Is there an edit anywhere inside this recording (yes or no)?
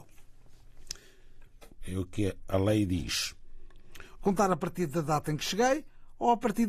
yes